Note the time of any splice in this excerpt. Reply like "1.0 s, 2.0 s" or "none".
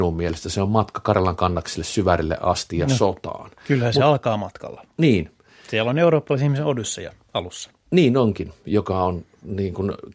none